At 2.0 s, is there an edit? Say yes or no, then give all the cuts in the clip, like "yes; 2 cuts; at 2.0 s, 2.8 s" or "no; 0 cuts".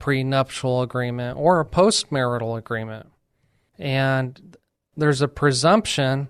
no; 1 cut; at 3.7 s